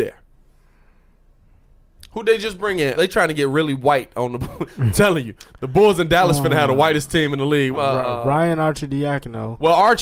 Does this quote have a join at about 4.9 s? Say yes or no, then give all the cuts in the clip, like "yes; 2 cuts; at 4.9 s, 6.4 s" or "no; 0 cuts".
no; 2 cuts; at 3.0 s, 7.7 s